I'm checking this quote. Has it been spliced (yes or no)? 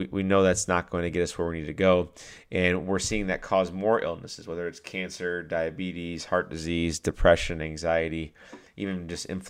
no